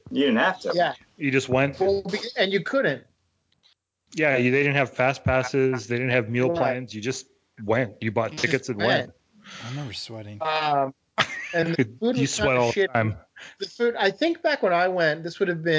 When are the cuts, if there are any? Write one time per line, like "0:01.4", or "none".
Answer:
none